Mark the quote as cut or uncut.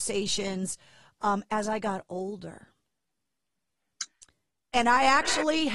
uncut